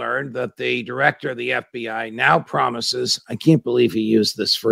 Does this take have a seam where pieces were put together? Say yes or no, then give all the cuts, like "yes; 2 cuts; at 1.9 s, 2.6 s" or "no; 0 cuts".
no; 0 cuts